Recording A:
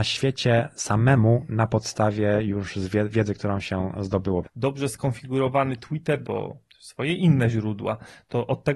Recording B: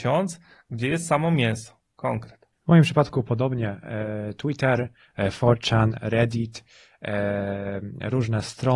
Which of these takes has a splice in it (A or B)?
A